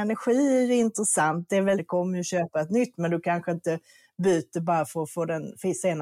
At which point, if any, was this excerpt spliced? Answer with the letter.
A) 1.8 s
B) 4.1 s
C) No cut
A